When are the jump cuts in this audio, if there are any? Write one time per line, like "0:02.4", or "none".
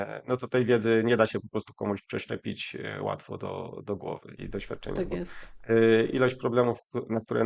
0:04.4